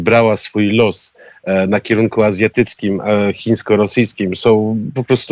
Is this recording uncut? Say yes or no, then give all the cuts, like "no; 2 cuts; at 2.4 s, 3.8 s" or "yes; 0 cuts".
yes; 0 cuts